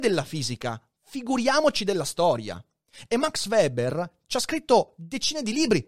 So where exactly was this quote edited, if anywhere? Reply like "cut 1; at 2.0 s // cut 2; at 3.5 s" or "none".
none